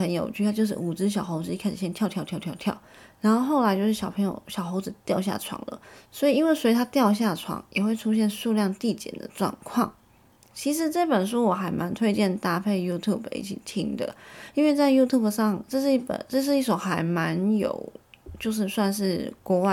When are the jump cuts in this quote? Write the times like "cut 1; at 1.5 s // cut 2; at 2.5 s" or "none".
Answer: none